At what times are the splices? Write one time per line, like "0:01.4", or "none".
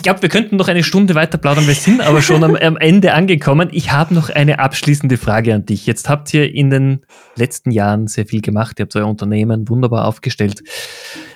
none